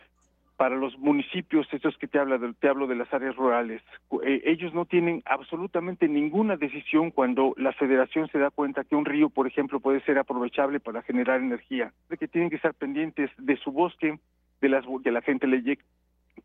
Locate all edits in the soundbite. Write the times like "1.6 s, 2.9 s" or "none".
12.1 s, 15.0 s